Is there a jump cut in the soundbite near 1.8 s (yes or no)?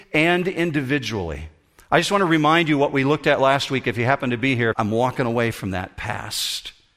no